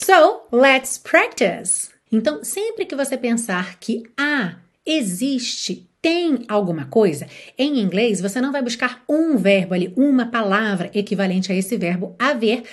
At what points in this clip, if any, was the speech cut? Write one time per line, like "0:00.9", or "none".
0:02.1